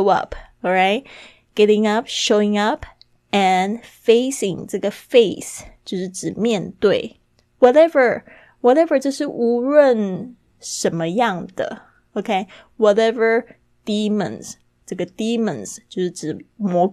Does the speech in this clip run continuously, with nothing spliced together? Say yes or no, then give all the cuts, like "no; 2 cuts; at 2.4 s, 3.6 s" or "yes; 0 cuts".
yes; 0 cuts